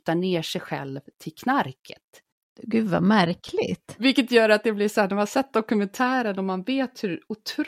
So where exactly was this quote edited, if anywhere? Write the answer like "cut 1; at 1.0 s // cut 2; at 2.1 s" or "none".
none